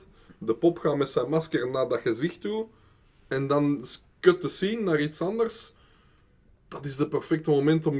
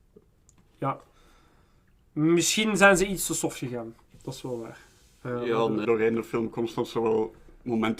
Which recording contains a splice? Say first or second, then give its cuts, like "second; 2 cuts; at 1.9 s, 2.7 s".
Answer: second; 1 cut; at 5.8 s